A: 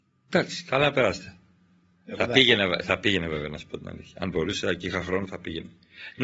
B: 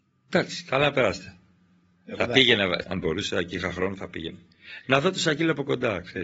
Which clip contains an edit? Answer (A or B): B